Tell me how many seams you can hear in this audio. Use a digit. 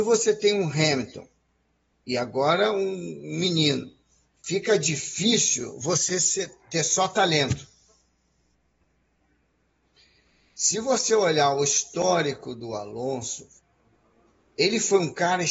1